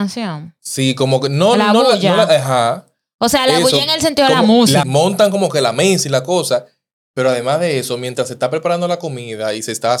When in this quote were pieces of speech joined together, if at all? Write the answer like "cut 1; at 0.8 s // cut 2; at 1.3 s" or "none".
cut 1; at 4.8 s